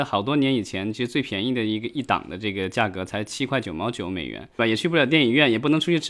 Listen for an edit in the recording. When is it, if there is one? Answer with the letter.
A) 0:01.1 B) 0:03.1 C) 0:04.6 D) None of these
C